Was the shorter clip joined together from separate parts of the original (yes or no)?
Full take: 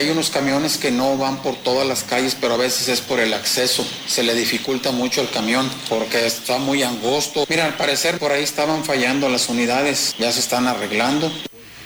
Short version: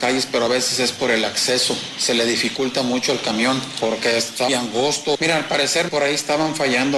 yes